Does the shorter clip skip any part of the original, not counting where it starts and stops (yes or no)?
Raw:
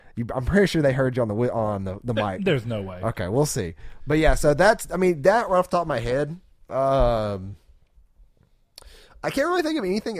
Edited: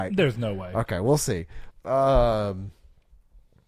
yes